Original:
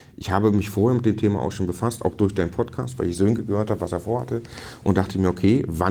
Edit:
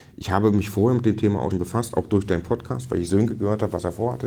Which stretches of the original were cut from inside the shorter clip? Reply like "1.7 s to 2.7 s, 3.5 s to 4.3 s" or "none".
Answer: 1.5 s to 1.6 s